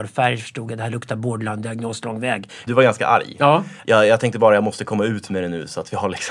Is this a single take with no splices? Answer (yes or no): no